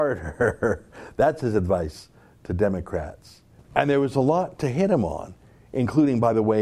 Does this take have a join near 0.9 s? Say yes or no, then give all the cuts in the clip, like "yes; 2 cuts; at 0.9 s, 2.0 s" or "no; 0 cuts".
no; 1 cut; at 3.6 s